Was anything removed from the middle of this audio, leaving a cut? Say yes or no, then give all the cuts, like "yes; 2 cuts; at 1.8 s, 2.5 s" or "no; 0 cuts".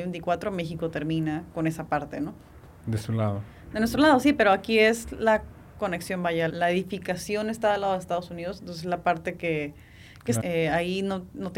yes; 2 cuts; at 6.5 s, 10.4 s